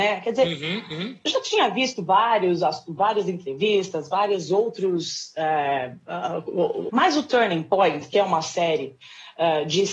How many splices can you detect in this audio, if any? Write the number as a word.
one